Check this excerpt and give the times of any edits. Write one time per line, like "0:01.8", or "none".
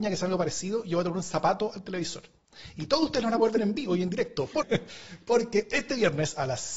0:04.6